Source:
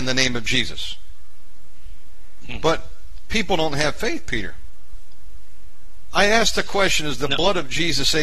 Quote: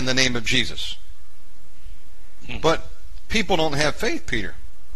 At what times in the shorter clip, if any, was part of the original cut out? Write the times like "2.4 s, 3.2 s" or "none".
none